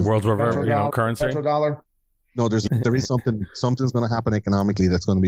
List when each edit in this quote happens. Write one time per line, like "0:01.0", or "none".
0:00.9
0:02.7